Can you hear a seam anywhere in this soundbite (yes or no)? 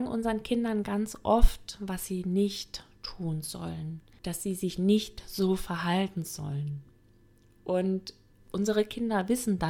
yes